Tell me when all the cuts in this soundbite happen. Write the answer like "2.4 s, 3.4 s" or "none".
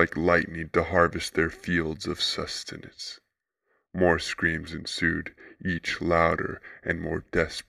none